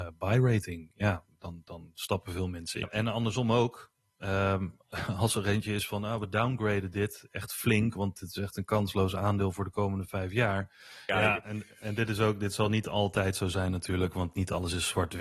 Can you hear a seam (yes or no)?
yes